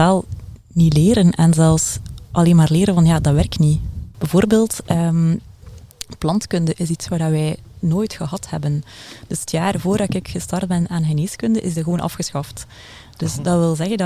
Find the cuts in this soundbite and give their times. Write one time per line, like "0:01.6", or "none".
0:04.1